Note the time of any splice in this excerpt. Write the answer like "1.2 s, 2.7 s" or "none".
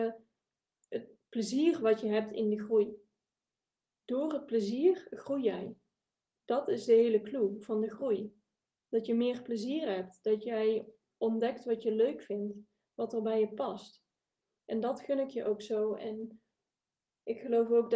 none